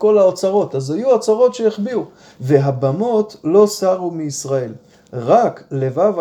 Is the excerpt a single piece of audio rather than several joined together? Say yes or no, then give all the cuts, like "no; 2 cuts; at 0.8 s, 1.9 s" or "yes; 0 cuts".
no; 1 cut; at 2.4 s